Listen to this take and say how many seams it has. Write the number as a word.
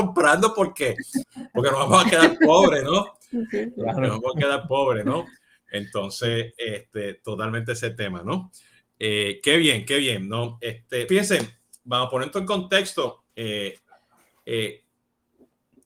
two